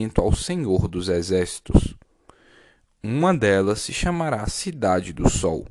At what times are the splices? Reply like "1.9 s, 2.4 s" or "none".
none